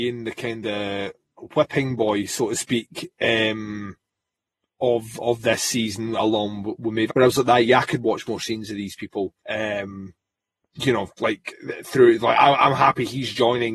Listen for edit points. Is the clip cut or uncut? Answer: cut